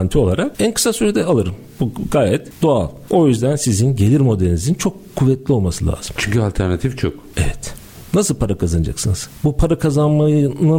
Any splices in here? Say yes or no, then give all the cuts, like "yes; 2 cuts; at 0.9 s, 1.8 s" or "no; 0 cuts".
no; 0 cuts